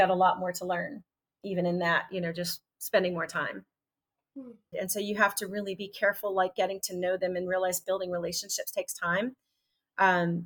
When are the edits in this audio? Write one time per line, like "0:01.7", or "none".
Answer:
0:04.7